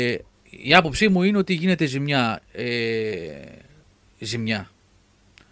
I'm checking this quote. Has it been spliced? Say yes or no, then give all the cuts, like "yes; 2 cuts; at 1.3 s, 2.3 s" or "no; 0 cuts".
no; 0 cuts